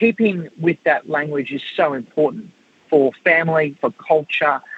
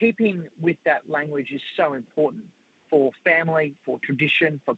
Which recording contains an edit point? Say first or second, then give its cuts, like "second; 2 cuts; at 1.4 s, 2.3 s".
first; 1 cut; at 3.8 s